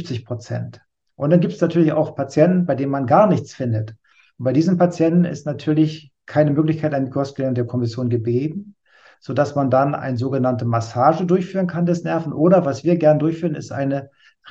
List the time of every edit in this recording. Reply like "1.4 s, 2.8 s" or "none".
none